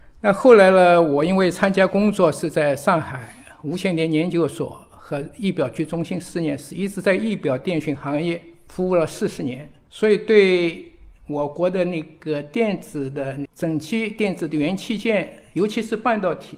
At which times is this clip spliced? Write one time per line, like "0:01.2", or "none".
none